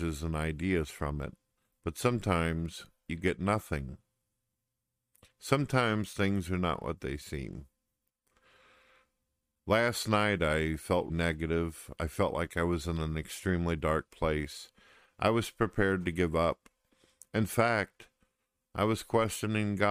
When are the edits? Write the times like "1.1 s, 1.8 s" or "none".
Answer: 11.1 s